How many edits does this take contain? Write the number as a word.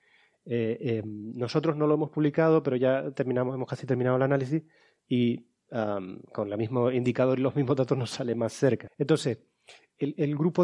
one